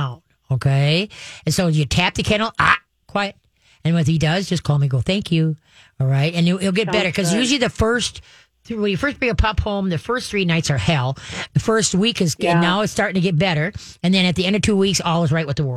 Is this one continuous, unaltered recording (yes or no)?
yes